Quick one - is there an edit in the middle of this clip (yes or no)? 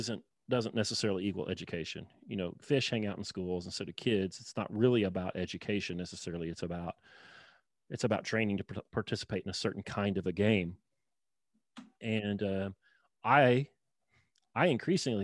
no